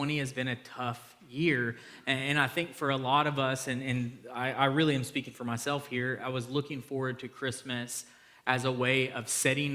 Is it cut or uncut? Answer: uncut